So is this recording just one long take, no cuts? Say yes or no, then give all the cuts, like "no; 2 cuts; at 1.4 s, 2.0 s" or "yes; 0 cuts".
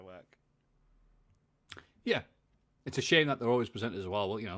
yes; 0 cuts